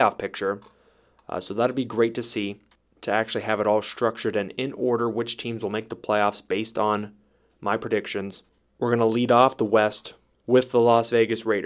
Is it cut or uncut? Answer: uncut